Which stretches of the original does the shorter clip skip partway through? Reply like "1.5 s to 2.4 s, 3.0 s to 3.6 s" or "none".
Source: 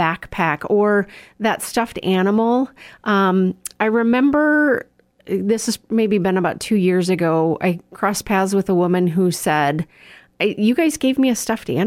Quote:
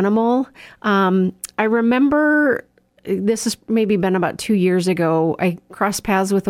none